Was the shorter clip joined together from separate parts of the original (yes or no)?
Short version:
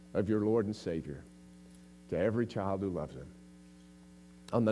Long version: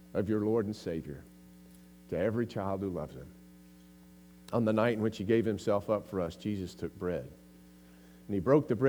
no